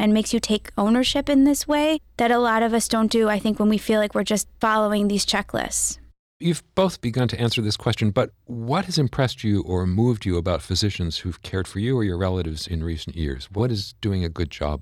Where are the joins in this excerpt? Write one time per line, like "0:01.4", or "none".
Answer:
none